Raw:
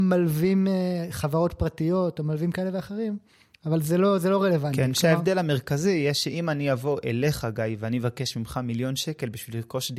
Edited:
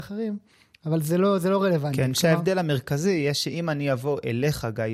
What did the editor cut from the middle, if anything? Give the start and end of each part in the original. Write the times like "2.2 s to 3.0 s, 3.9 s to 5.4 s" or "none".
none